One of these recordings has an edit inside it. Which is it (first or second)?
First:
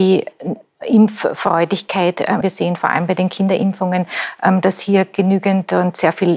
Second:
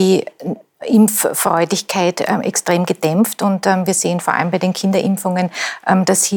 first